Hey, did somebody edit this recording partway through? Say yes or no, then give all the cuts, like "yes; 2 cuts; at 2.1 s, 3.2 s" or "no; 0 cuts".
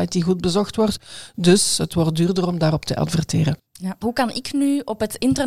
yes; 1 cut; at 4.0 s